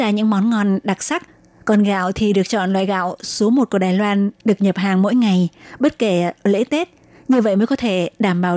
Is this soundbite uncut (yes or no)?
yes